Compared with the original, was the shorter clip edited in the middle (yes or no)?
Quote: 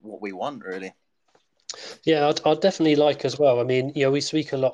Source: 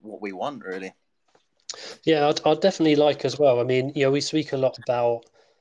no